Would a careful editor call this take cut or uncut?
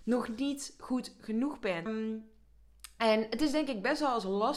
cut